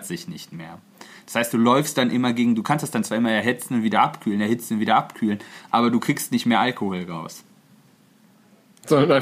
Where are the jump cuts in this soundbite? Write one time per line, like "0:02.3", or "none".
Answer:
none

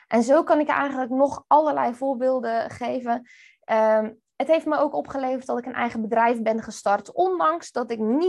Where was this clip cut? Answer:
none

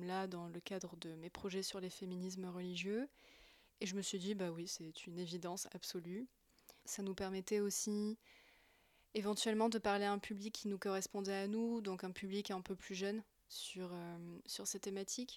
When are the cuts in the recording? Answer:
0:06.8

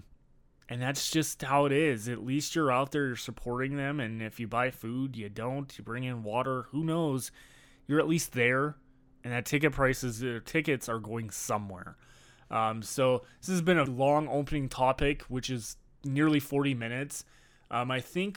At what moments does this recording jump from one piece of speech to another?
0:13.9

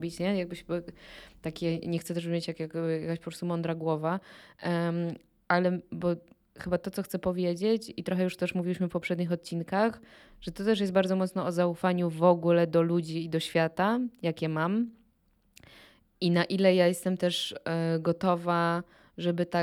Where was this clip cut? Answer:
none

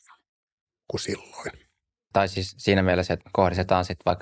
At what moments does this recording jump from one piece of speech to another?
0:02.1
0:03.2

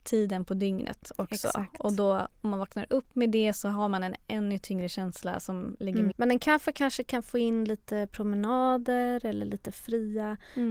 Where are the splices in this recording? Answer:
0:06.1

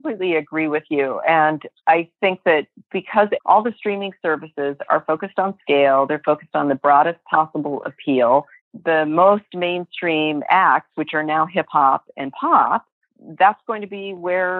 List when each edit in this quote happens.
none

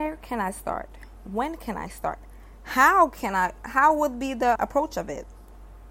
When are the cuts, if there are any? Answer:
0:04.6

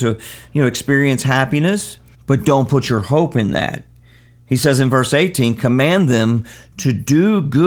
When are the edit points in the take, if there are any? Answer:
0:02.1

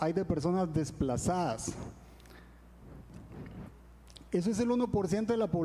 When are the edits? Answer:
0:04.3

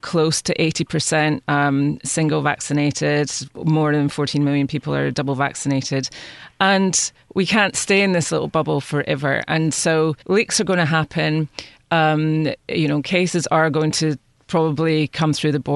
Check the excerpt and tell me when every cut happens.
0:10.2

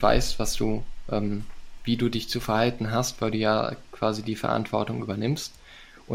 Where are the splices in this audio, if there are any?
none

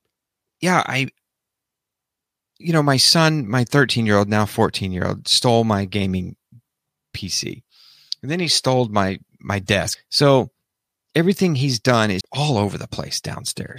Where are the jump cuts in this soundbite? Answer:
0:09.9
0:12.2

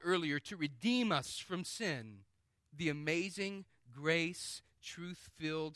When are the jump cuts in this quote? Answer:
0:02.6

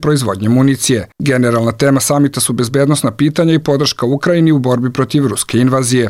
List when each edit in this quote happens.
0:01.1

